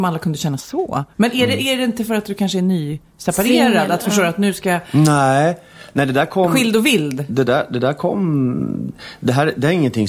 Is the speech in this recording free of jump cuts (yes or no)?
yes